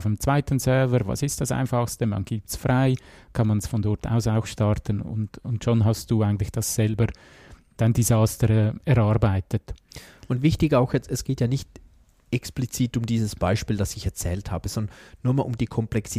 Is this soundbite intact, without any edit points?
yes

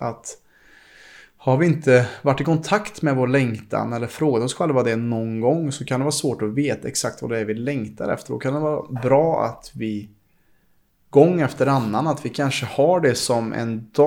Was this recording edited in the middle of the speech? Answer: no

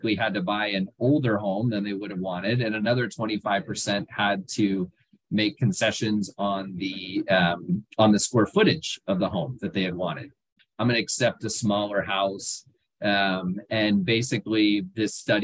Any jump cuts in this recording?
yes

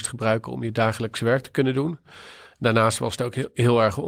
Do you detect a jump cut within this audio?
no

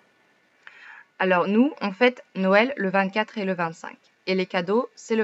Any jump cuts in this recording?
no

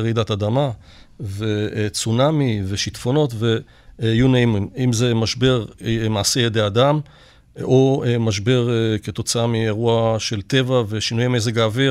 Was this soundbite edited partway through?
no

